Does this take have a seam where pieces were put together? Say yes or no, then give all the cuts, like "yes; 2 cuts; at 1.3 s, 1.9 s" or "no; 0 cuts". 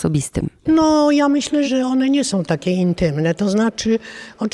yes; 1 cut; at 1.6 s